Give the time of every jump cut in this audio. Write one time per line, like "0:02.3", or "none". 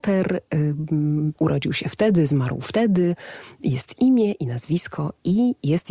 0:01.4